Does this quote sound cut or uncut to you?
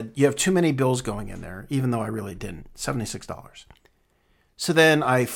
uncut